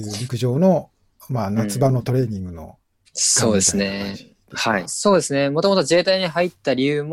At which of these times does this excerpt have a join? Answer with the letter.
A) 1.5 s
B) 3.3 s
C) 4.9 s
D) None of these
C